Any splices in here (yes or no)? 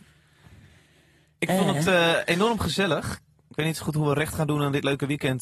no